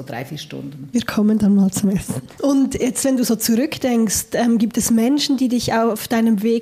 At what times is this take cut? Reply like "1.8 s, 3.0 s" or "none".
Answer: 2.4 s